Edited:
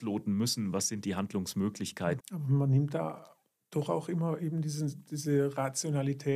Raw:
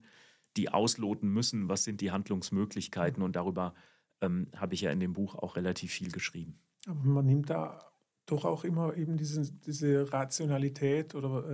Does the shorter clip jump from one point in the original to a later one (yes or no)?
yes